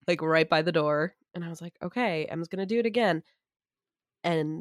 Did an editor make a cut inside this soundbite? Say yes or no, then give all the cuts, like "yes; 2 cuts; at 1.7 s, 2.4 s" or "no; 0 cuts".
no; 0 cuts